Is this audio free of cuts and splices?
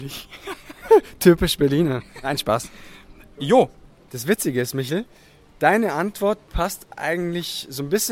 yes; 0 cuts

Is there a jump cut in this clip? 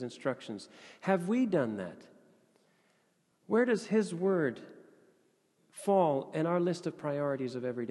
no; 0 cuts

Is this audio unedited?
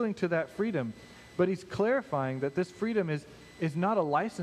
yes; 0 cuts

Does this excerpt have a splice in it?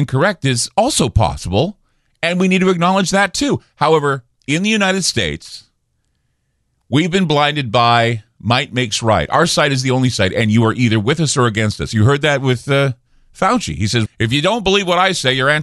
yes; 1 cut; at 14.1 s

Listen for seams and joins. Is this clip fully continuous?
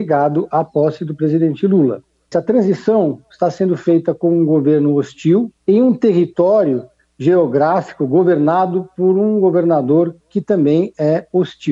no; 2 cuts; at 2.3 s, 5.6 s

